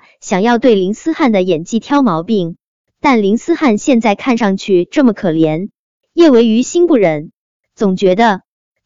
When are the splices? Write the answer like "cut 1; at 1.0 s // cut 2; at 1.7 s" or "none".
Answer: none

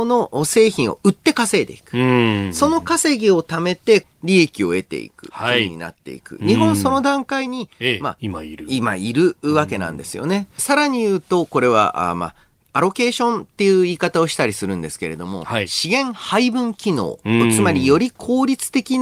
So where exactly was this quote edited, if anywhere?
cut 1; at 4.0 s // cut 2; at 8.2 s // cut 3; at 10.6 s

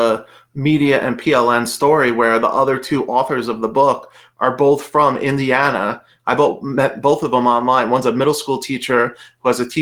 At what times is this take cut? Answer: none

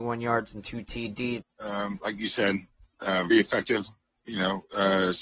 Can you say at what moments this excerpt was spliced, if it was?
cut 1; at 1.4 s // cut 2; at 3.3 s

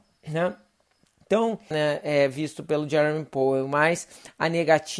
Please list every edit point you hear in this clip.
cut 1; at 1.7 s

